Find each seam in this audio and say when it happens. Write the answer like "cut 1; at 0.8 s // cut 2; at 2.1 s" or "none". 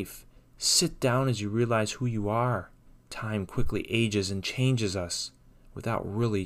none